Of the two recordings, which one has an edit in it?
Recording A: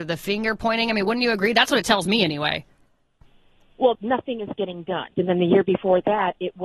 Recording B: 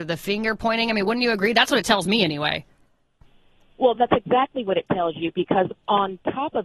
A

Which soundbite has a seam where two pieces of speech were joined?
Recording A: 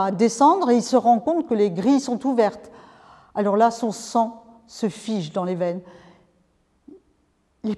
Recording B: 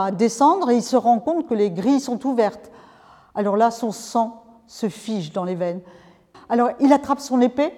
B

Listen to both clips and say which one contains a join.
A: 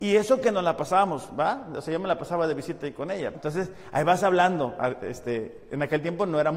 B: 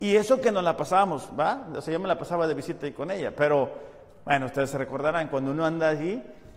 A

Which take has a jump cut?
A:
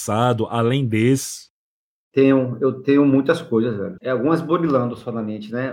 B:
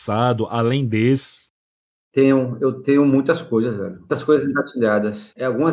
A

